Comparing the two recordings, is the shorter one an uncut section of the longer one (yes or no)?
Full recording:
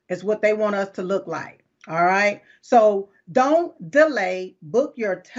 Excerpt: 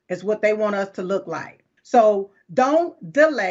no